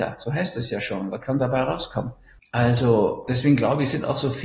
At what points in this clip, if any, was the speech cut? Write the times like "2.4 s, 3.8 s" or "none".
2.4 s